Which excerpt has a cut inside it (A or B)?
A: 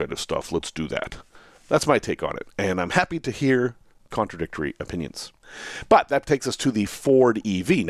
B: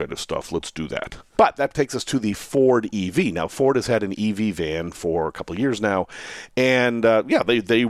B